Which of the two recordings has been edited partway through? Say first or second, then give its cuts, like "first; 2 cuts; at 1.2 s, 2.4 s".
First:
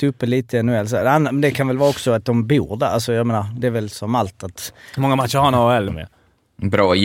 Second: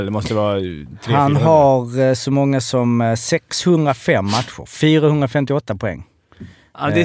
first; 1 cut; at 5.9 s